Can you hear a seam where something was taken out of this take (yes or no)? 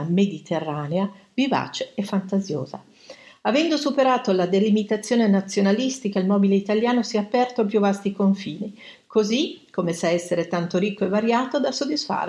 no